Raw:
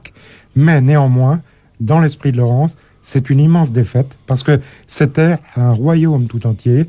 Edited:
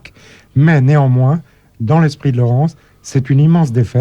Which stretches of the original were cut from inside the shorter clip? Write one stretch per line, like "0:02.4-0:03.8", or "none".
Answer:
none

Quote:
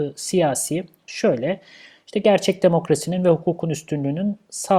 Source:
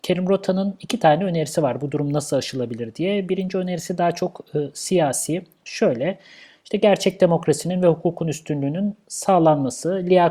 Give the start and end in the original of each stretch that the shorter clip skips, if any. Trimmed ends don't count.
none

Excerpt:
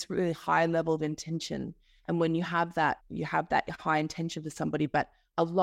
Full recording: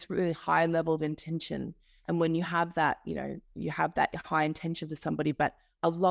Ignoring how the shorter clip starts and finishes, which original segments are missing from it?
0:03.0-0:03.4

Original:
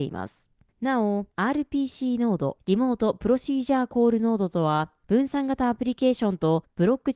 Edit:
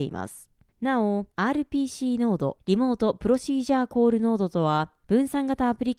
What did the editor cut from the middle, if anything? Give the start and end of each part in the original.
none

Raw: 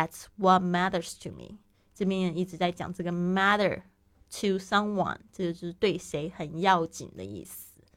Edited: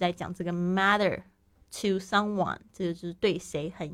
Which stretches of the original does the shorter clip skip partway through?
none

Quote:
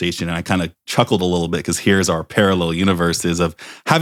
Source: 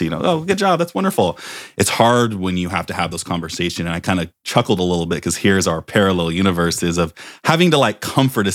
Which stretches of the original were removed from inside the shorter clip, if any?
none

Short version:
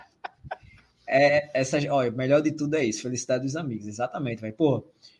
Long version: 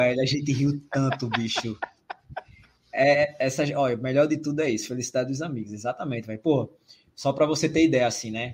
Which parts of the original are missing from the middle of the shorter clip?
none

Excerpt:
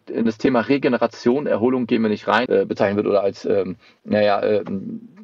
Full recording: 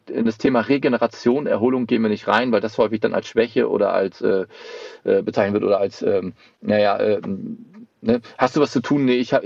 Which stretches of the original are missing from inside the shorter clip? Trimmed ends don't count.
0:02.5-0:05.0

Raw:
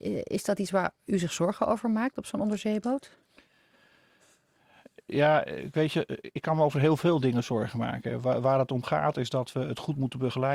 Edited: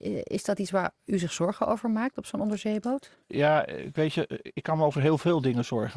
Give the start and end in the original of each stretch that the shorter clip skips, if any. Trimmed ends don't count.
0:03.2-0:05.0

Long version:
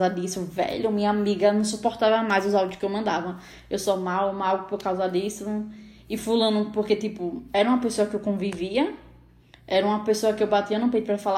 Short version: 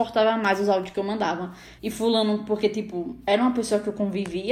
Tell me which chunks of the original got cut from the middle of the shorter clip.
0:03.6-0:06.0

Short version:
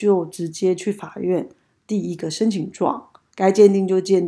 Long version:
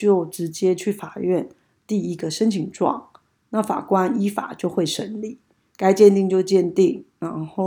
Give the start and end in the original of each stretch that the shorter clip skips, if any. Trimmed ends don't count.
0:03.3-0:05.7

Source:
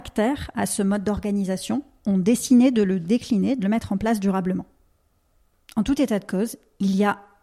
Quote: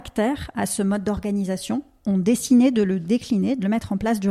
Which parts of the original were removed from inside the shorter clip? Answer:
none

